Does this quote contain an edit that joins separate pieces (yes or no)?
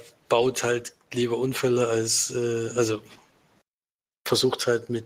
no